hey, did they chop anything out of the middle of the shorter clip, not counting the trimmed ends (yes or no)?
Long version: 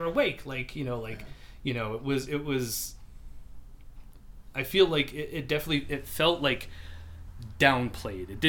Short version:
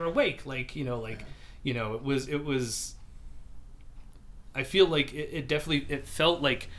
no